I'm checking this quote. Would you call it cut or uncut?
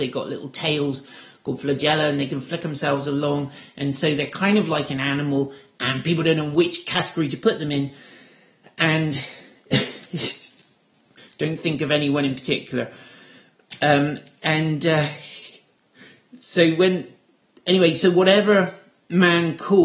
uncut